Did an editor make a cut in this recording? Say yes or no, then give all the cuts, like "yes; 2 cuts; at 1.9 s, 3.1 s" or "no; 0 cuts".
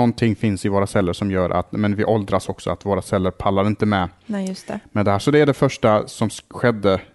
no; 0 cuts